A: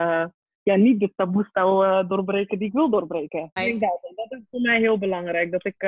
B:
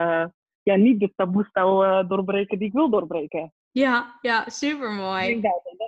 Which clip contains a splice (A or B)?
A